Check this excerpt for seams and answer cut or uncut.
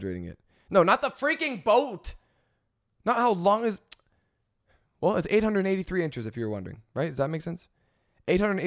uncut